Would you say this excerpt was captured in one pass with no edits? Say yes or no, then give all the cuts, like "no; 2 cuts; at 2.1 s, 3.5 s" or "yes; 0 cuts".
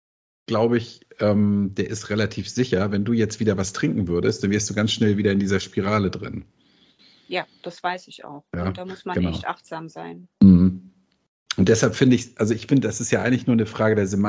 yes; 0 cuts